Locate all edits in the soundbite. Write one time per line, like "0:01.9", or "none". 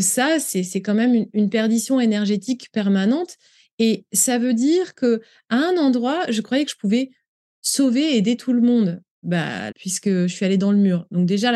0:09.7